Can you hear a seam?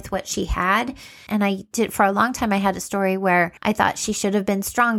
yes; 2 cuts; at 1.3 s, 3.6 s

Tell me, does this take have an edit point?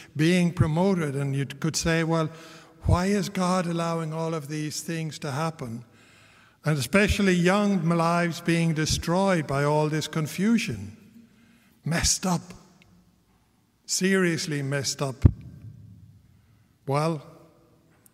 no; 0 cuts

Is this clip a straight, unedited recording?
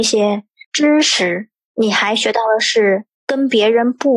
no; 1 cut; at 3.1 s

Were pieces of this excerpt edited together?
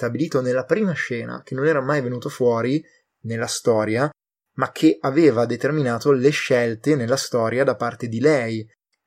no; 0 cuts

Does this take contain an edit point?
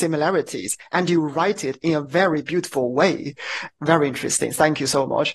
no; 0 cuts

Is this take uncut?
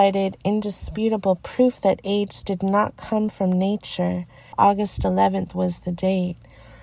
no; 1 cut; at 4.5 s

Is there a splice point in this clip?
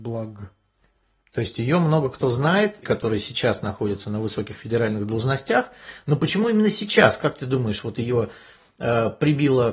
yes; 1 cut; at 2.8 s

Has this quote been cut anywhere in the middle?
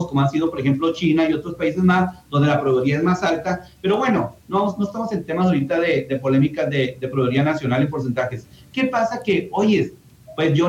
no; 0 cuts

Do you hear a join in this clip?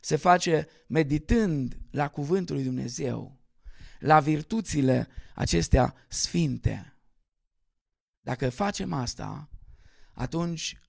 no; 0 cuts

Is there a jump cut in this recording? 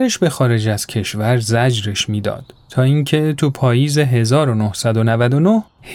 no; 0 cuts

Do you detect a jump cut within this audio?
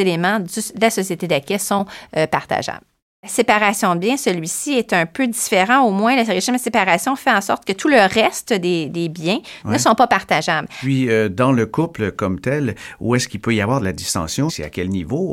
no; 0 cuts

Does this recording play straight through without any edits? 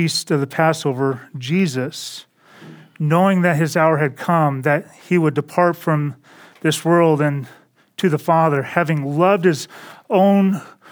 yes; 0 cuts

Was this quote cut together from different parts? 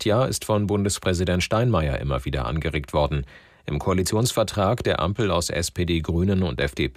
no; 0 cuts

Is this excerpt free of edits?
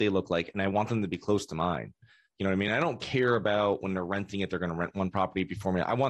yes; 0 cuts

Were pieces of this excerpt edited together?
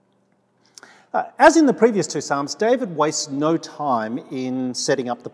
no; 0 cuts

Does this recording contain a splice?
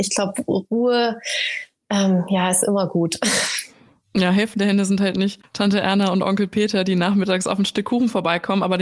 no; 0 cuts

